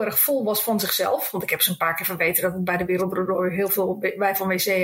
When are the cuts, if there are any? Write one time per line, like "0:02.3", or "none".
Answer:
none